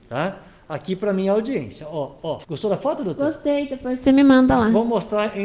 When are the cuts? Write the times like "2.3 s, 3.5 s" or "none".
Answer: 2.4 s